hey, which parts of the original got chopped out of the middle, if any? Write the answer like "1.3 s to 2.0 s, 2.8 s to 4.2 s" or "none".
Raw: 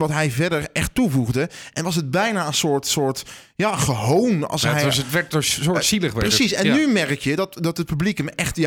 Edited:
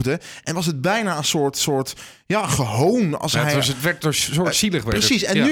none